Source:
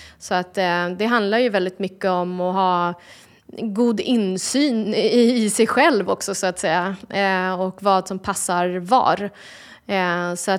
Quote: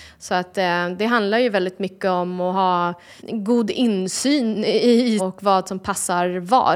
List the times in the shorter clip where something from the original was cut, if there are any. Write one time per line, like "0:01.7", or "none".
0:03.2
0:05.2